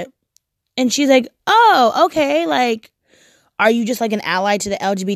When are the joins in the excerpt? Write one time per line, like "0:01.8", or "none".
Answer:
none